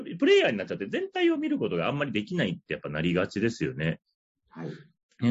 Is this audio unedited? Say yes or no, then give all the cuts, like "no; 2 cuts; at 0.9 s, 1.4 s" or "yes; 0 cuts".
yes; 0 cuts